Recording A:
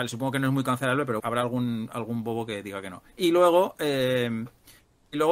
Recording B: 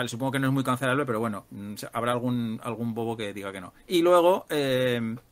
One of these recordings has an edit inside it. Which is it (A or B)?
A